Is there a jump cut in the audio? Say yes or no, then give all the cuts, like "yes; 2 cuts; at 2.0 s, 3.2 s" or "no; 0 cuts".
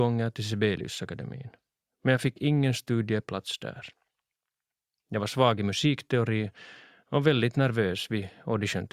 no; 0 cuts